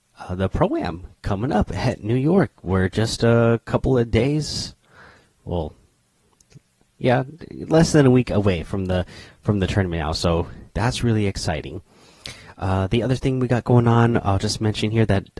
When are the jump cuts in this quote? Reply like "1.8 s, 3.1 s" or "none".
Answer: none